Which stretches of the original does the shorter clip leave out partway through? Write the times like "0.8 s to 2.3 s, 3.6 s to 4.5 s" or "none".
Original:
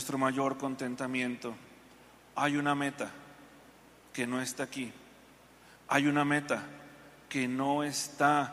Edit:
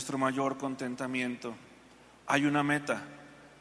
2.2 s to 5.8 s

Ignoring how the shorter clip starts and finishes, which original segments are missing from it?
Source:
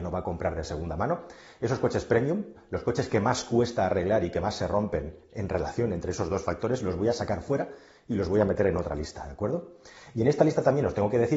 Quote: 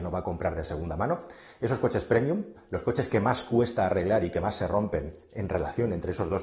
none

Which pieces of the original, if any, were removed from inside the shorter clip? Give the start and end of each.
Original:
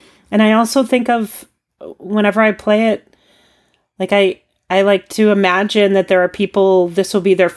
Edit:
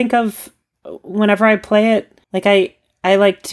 3.2 s to 3.9 s

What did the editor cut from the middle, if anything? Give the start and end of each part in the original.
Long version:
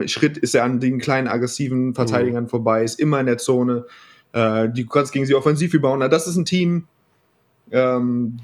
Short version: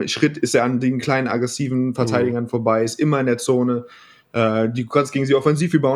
none

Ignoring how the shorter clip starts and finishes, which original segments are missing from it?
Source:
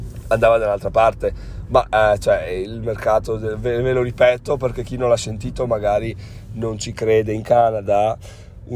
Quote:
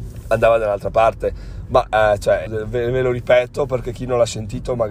2.5 s to 3.4 s

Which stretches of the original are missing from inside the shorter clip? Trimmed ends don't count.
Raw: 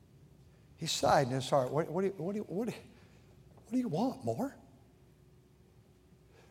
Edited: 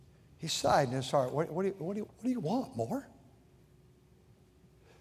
2.5 s to 3.5 s

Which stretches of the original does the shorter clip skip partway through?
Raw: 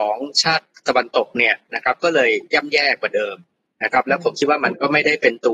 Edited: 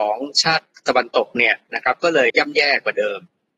2.3 s to 2.5 s

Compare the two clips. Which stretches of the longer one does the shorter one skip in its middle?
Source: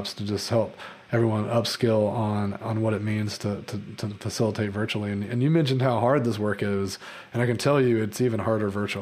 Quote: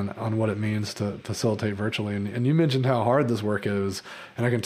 3.6 s to 4.2 s

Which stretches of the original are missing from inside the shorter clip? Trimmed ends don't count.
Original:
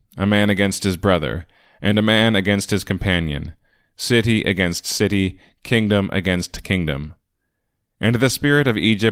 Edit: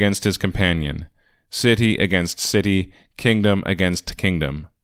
none

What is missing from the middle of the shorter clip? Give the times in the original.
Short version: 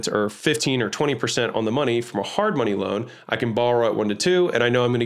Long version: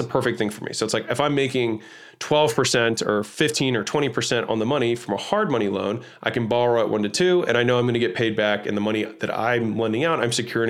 none

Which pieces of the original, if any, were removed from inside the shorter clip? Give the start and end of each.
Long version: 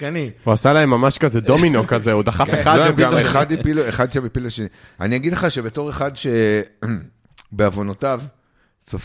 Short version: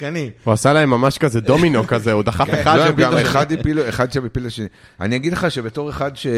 none

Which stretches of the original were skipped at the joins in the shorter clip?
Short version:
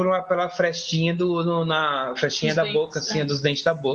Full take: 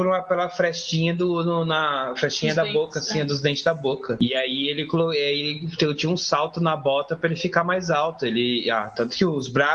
none

